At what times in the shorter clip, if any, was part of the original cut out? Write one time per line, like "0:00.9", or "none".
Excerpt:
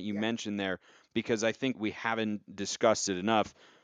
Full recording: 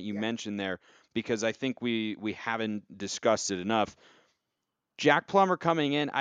0:01.7